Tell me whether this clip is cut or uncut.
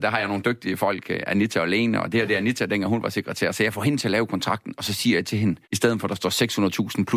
cut